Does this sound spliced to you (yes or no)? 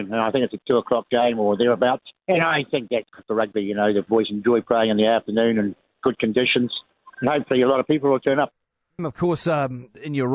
yes